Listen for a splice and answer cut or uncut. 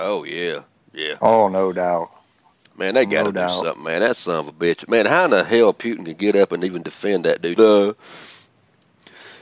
cut